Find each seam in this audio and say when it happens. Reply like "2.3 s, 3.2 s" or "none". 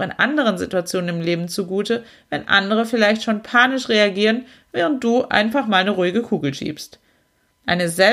none